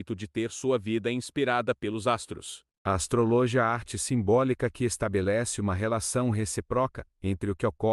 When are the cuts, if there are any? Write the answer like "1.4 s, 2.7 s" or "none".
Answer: 2.7 s